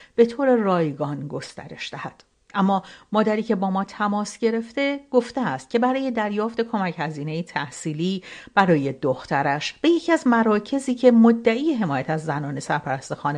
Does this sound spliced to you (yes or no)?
no